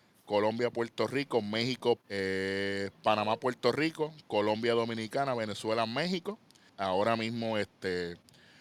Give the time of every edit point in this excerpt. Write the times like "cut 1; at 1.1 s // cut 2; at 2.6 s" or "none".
cut 1; at 2.0 s // cut 2; at 6.7 s